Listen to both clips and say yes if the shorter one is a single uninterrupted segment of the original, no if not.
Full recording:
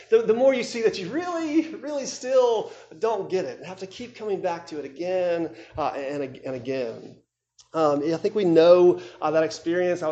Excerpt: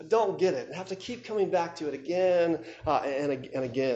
yes